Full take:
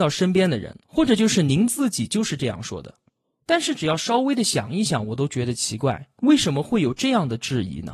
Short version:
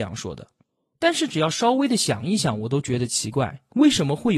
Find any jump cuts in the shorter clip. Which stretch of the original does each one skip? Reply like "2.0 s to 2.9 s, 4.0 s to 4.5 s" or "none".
none